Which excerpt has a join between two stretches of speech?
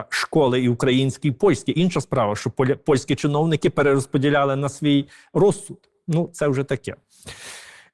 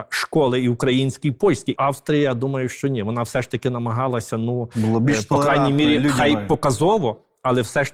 second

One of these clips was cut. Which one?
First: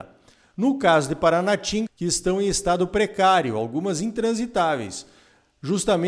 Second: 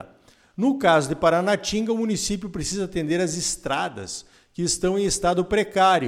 first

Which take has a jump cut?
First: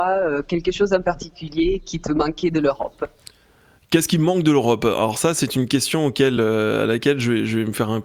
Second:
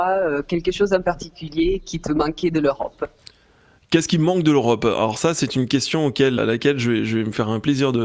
second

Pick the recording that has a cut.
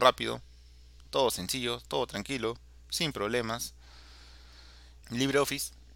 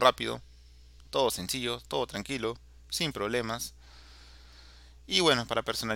first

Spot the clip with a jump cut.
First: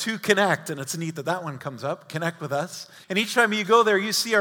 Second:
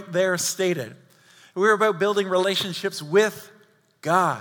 first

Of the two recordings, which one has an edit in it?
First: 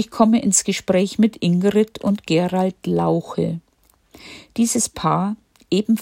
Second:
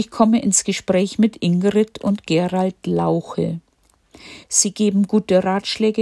second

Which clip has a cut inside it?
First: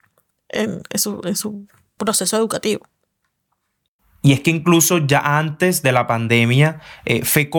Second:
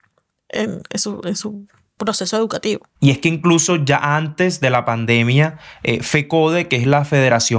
second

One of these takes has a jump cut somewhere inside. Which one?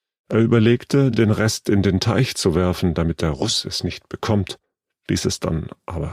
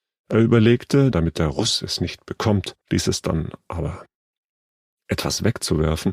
second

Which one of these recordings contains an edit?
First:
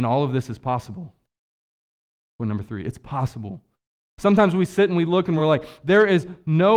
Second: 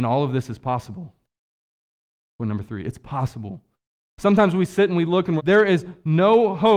second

